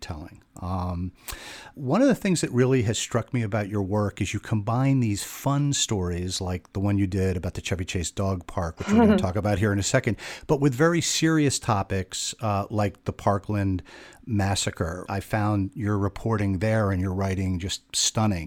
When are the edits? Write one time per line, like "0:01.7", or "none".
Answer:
0:01.7
0:15.1